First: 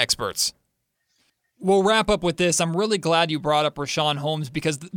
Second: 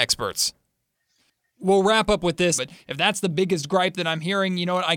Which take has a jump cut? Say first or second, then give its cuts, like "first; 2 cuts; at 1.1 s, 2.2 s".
second; 1 cut; at 2.6 s